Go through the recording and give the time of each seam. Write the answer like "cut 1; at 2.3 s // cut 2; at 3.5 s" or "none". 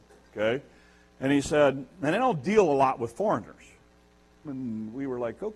cut 1; at 4.4 s